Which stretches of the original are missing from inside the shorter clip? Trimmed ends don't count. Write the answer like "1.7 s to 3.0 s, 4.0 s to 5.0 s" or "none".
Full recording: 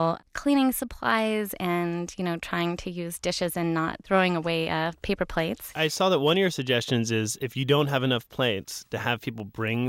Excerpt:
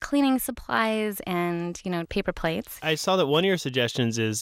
2.4 s to 5.0 s